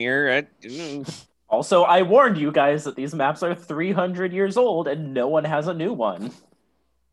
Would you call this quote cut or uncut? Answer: uncut